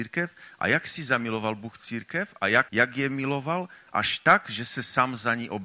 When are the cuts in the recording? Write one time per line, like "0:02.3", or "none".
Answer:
0:02.7